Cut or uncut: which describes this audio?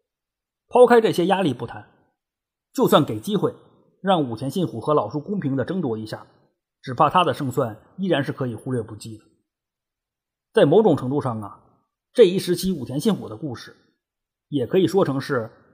uncut